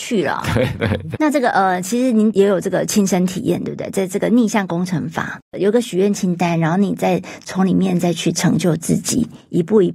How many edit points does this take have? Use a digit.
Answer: 1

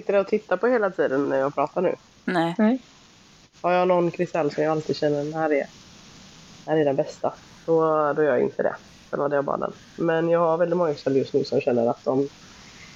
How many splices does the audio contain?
2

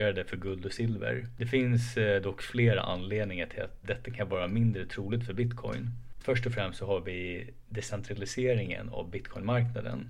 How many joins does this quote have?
1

